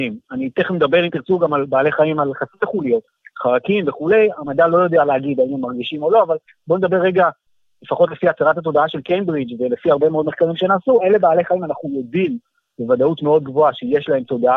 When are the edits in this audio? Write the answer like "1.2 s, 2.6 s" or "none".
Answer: none